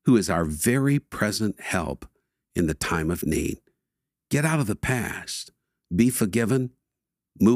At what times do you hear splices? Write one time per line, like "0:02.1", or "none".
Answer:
0:05.8